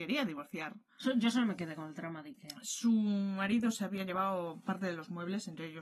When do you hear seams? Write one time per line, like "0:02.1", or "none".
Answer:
none